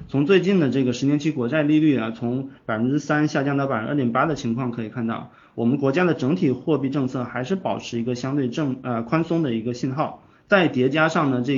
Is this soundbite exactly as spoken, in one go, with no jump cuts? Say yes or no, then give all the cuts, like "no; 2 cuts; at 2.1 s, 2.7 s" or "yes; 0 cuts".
no; 1 cut; at 10.3 s